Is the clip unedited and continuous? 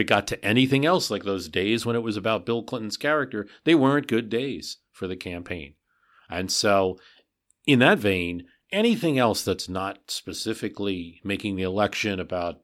yes; 0 cuts

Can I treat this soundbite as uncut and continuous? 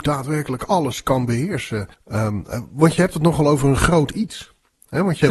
no; 1 cut; at 1.9 s

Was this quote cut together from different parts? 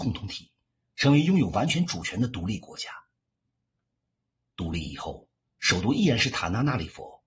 no; 0 cuts

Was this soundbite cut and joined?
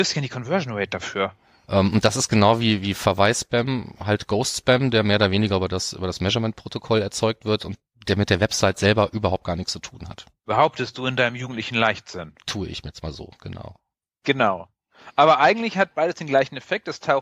yes; 1 cut; at 1.6 s

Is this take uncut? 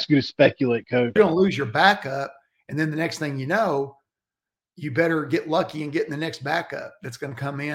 no; 1 cut; at 1.2 s

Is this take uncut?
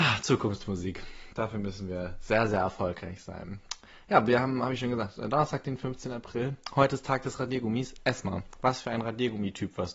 yes; 0 cuts

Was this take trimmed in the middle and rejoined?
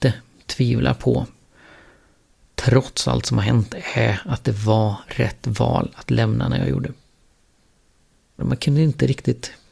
yes; 1 cut; at 8.4 s

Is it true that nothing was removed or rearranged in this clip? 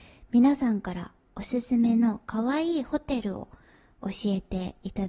yes; 0 cuts

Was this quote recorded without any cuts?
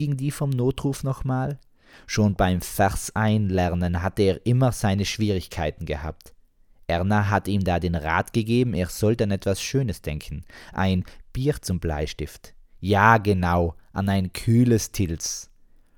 yes; 0 cuts

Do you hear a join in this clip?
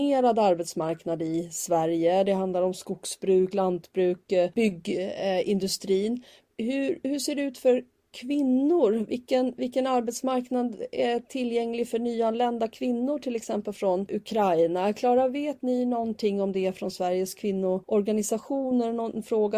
no; 0 cuts

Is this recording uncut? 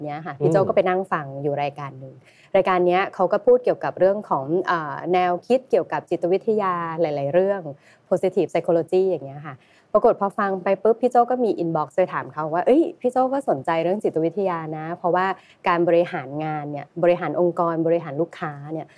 yes; 0 cuts

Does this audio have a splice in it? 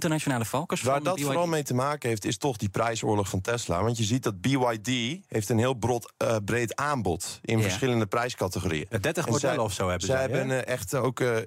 no; 0 cuts

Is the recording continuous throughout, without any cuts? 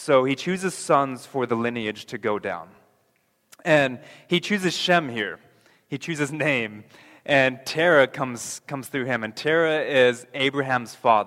yes; 0 cuts

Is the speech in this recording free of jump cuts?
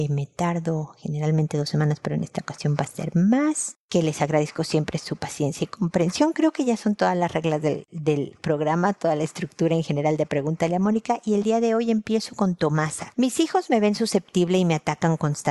no; 1 cut; at 13.1 s

